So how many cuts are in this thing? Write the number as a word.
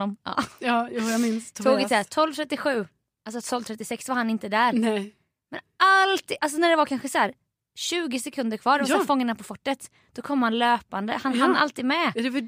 zero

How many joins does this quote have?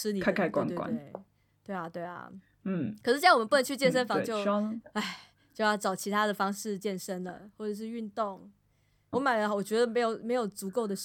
two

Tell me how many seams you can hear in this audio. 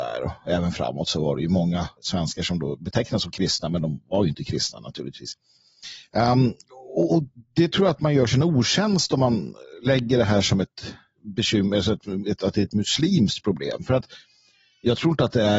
three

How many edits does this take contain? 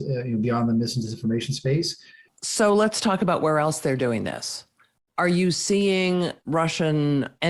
one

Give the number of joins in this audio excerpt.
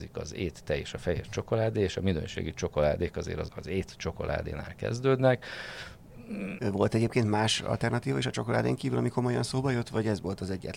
two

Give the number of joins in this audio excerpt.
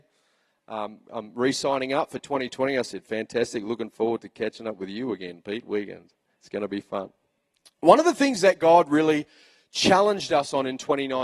zero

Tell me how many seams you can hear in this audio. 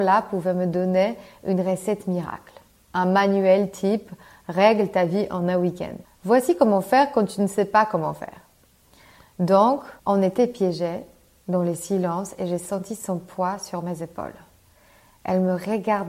two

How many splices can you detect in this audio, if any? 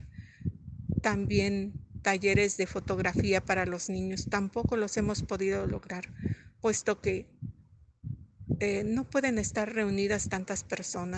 zero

